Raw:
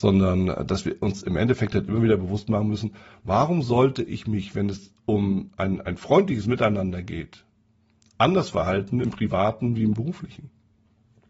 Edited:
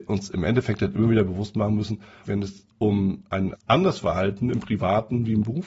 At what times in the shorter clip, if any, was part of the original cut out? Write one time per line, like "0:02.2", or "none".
0:02.3
0:03.5